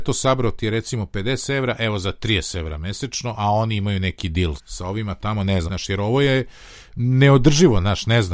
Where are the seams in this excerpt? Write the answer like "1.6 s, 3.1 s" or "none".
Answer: 4.6 s, 5.7 s